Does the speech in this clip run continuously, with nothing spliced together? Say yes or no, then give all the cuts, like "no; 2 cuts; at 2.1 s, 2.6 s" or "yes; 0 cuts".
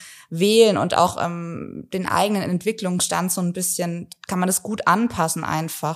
yes; 0 cuts